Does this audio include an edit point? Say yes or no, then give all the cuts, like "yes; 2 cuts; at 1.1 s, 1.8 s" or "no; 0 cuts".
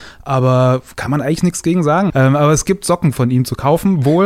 yes; 1 cut; at 2.1 s